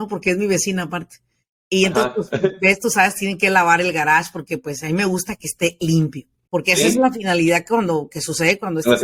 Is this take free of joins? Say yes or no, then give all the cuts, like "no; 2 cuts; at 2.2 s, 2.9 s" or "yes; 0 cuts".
no; 1 cut; at 6.5 s